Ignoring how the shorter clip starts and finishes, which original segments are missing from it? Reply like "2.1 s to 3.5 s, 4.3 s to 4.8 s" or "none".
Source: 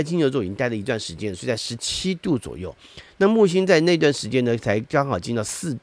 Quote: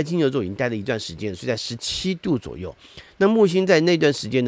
none